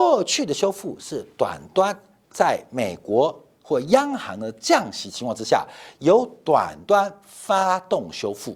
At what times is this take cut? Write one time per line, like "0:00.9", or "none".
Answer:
none